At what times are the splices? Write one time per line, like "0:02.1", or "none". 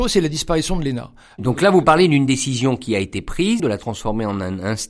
0:03.6